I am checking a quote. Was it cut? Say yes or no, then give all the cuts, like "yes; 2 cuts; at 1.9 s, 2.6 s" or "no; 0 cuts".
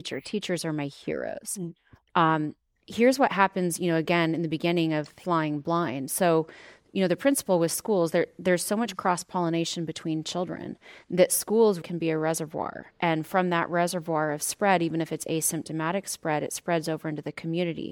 yes; 1 cut; at 11.8 s